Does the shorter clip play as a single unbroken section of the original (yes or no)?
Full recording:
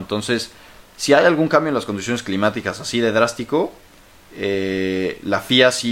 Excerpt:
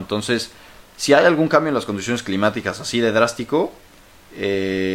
yes